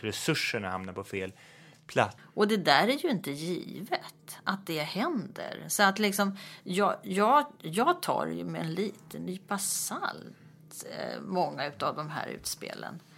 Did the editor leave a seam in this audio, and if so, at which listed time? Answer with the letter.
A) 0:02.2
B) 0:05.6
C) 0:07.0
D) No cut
A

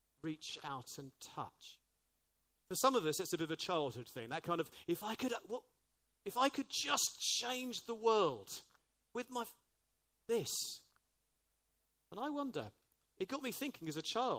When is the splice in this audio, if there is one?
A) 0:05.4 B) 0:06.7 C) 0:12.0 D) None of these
D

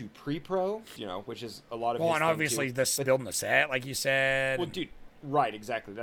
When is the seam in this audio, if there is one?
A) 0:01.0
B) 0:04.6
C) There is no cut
A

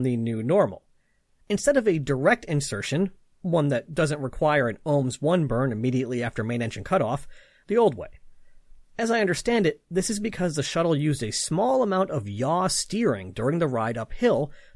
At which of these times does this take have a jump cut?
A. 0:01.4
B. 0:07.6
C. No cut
B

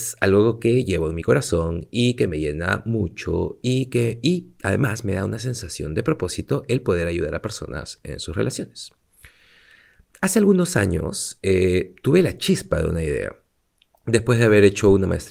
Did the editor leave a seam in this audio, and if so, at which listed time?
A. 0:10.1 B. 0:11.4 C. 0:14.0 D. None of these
D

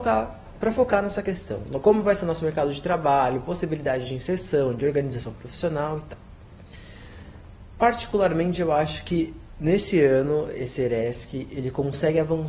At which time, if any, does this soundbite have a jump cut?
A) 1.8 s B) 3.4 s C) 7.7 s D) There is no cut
D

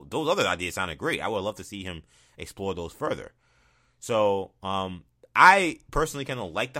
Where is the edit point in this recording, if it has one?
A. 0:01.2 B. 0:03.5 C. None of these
C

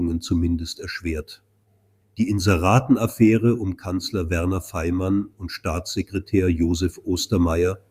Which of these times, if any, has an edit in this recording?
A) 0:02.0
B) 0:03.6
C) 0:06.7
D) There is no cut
A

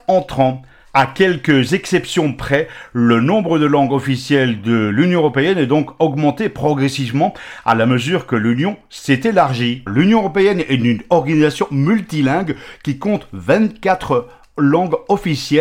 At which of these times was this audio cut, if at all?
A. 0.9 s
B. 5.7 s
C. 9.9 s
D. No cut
C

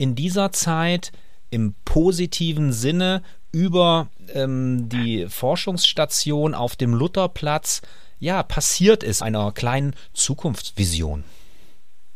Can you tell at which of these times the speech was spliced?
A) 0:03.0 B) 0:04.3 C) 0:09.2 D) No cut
C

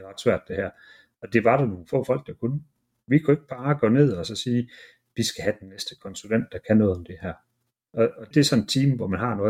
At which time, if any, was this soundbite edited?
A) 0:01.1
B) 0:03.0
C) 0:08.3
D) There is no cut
C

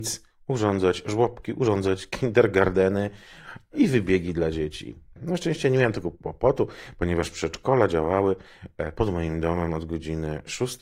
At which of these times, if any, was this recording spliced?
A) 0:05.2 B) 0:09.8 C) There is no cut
A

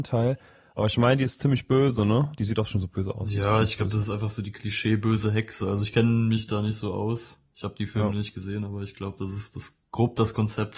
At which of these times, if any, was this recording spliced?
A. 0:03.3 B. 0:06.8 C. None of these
C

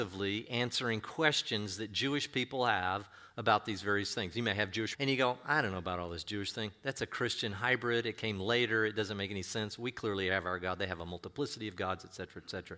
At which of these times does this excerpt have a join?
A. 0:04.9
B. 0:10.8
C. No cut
A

